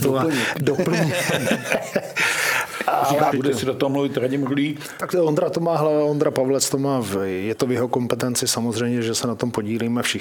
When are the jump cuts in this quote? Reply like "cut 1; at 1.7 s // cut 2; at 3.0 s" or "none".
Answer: cut 1; at 3.3 s